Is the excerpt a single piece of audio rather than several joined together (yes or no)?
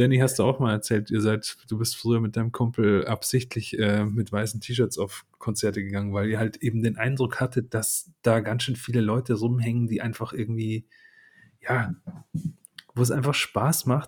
yes